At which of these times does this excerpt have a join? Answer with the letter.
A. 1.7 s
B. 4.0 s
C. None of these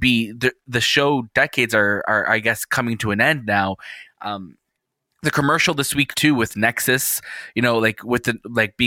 B